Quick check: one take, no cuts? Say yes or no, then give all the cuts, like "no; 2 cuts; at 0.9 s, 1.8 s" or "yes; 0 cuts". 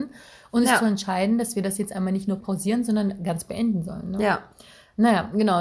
no; 1 cut; at 2.4 s